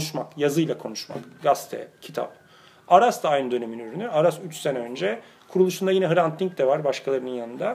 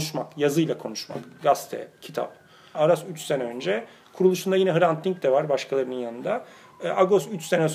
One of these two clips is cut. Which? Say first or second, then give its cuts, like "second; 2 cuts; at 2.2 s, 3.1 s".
second; 1 cut; at 2.7 s